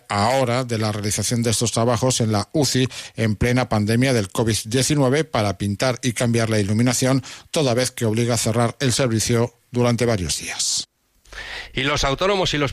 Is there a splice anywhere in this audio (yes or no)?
no